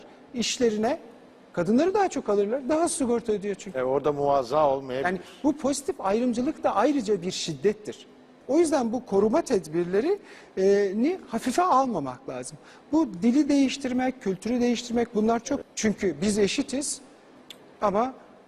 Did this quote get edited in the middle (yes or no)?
yes